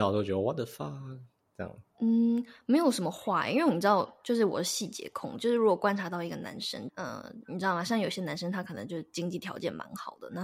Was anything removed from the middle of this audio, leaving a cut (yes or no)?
yes